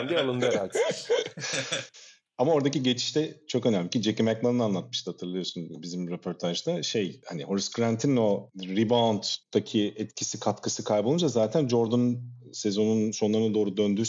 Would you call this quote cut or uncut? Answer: uncut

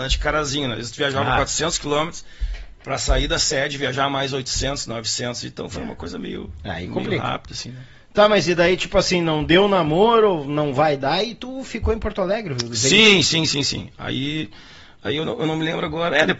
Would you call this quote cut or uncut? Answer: uncut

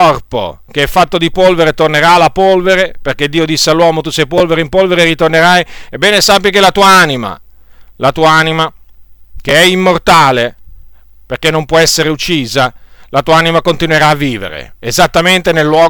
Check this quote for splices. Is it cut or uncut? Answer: uncut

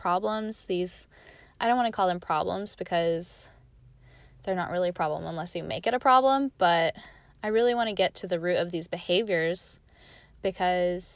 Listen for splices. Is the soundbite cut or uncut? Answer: uncut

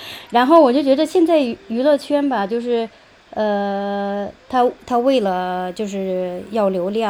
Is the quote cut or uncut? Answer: uncut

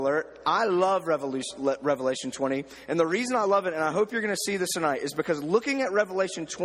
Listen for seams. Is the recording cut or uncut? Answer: uncut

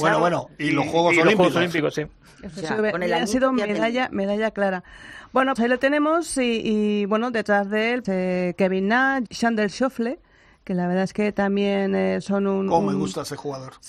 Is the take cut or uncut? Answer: cut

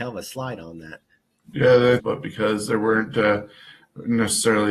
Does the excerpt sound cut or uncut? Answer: cut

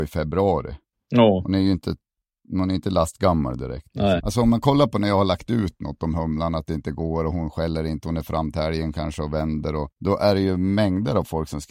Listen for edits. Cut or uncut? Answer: cut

